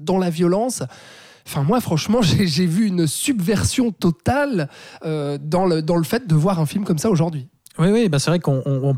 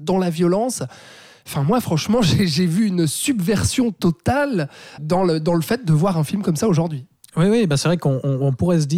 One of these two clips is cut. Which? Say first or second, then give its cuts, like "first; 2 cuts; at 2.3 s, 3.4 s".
second; 1 cut; at 5.0 s